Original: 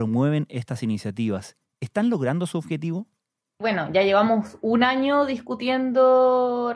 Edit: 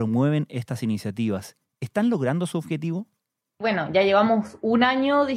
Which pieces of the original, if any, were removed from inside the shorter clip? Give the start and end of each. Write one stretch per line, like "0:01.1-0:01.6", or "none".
none